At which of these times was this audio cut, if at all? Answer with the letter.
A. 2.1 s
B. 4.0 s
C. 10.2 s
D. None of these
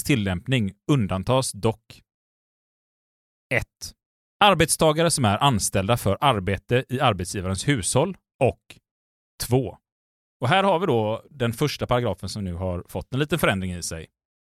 C